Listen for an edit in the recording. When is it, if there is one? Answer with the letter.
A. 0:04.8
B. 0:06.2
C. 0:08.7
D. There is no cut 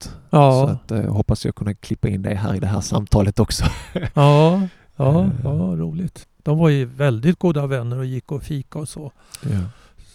B